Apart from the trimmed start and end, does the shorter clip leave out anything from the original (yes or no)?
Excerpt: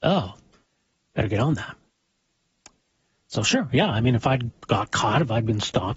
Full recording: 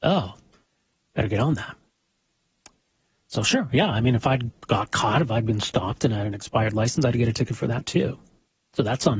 no